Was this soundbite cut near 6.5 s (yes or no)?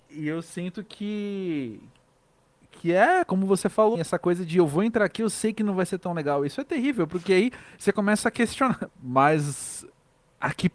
no